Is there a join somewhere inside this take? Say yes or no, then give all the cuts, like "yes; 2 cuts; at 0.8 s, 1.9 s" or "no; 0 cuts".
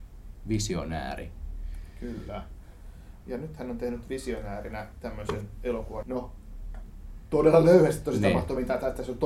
yes; 1 cut; at 6.0 s